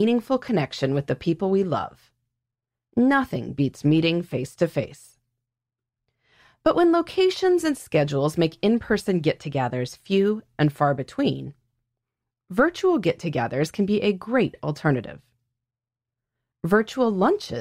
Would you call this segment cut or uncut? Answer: uncut